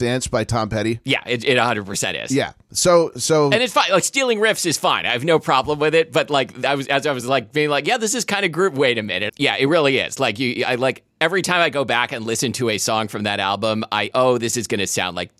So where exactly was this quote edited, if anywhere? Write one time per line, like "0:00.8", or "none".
0:09.3
0:14.1